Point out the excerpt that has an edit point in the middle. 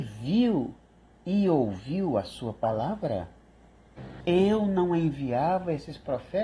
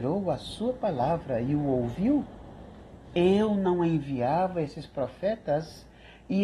first; 1 cut; at 4.2 s

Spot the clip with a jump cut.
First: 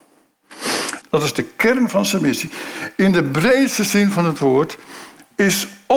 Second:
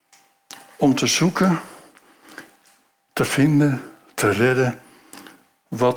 first; 1 cut; at 1.0 s

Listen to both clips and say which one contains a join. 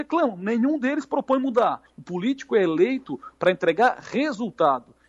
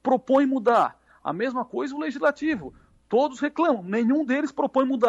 first; 1 cut; at 1.9 s

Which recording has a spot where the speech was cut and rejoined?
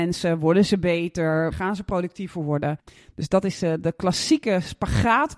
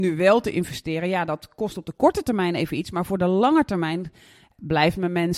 first; 1 cut; at 1.5 s

